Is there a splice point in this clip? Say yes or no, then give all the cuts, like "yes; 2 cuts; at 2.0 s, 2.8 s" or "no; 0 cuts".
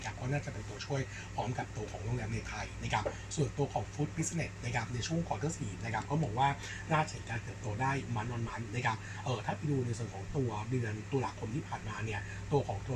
no; 0 cuts